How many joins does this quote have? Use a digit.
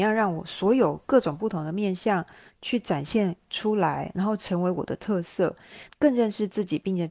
1